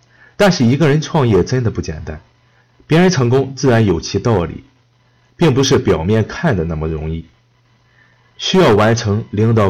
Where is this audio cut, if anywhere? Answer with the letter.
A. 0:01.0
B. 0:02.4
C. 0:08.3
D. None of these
C